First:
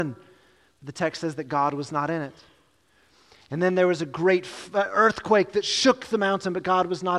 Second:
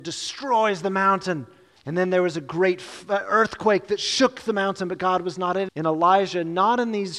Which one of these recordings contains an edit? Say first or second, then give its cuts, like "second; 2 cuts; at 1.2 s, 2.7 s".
second; 2 cuts; at 1.8 s, 5.7 s